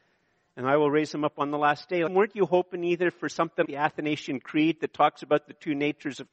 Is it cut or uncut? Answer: cut